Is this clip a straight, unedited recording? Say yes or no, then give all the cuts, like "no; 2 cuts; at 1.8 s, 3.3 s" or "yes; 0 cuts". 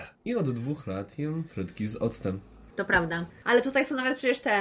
no; 1 cut; at 3.3 s